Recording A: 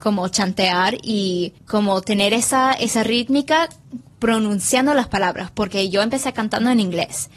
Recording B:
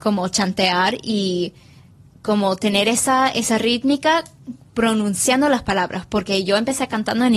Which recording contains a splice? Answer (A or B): A